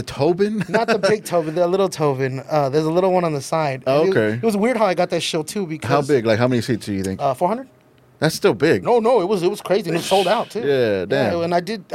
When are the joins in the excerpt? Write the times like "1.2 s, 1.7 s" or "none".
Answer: none

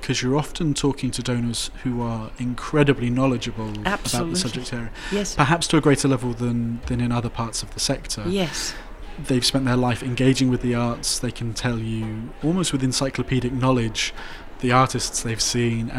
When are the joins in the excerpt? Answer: none

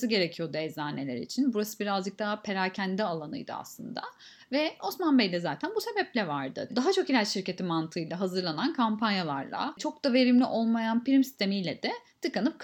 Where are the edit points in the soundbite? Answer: 6.7 s

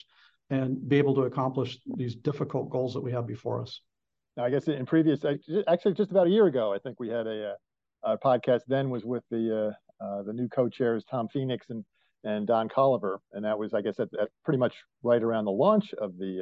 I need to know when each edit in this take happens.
none

